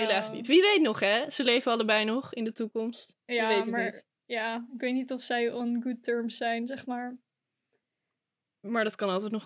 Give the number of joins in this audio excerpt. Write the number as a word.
zero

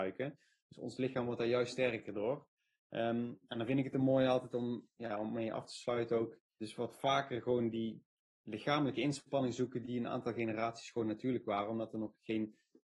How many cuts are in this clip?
one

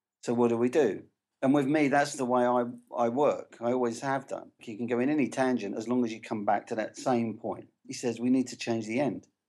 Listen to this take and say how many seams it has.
three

